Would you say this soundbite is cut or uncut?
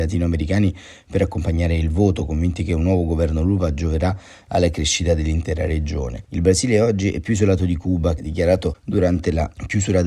cut